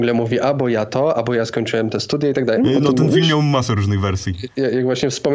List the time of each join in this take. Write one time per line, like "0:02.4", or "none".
0:02.6